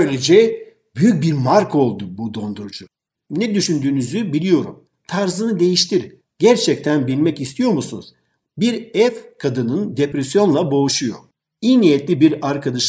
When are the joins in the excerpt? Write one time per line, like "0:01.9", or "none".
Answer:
0:05.0
0:06.2
0:08.4

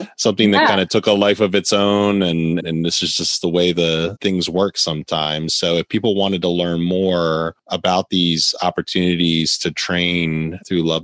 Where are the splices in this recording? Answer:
0:02.6
0:04.2

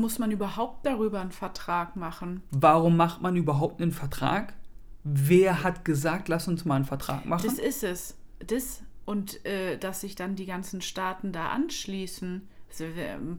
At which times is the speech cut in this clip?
none

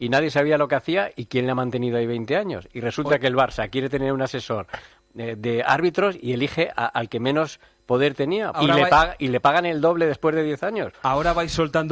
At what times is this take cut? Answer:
0:08.5

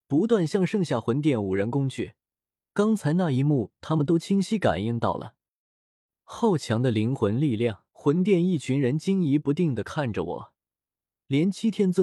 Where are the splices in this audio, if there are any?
0:02.7
0:07.9

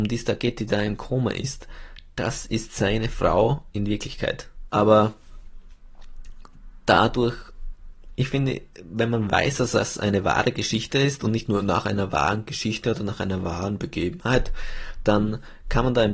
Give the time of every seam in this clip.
0:04.7

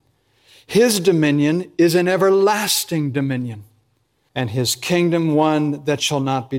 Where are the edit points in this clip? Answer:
0:04.3

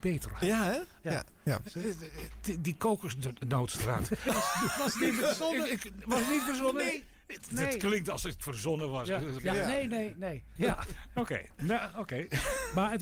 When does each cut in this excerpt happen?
0:09.4
0:10.6

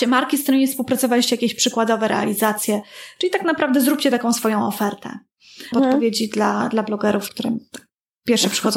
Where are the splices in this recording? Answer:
0:05.7
0:07.3

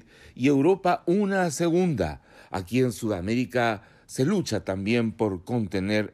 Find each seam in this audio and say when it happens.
none

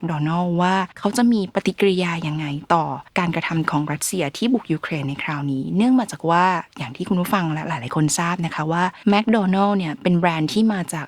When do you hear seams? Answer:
0:00.9
0:03.1
0:09.0

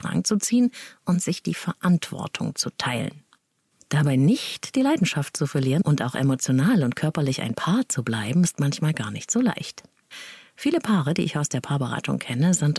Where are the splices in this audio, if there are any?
none

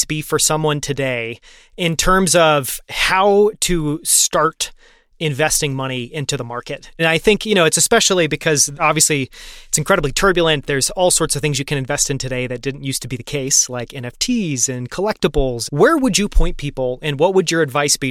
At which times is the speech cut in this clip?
0:15.7

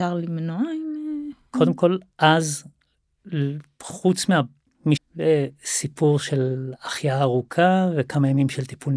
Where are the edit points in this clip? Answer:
0:05.0

